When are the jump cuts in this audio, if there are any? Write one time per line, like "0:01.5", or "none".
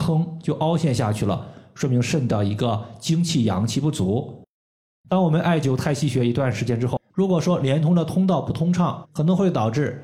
0:07.1
0:09.0